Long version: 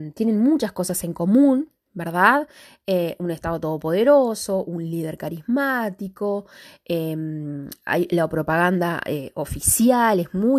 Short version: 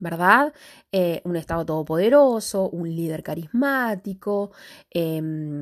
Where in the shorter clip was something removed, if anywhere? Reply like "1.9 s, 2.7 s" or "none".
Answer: none